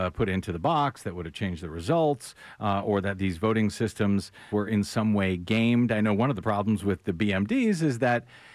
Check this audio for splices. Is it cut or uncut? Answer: cut